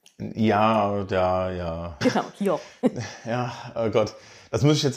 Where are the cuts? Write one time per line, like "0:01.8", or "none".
0:02.0